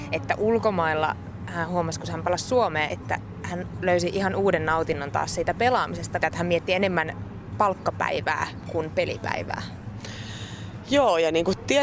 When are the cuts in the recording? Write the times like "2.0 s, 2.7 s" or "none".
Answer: 2.9 s, 6.2 s